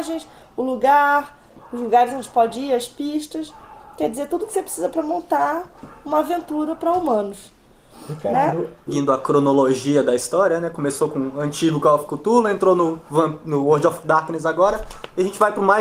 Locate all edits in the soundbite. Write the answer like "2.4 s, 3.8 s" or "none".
8.9 s